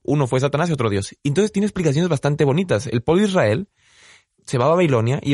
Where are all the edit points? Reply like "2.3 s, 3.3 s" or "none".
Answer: none